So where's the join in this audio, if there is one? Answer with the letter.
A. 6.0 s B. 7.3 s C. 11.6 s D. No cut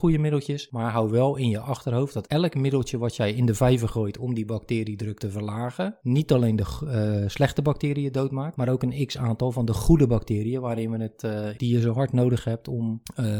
C